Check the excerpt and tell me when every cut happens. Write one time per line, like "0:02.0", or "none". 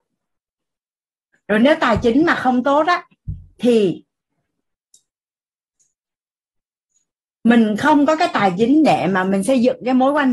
none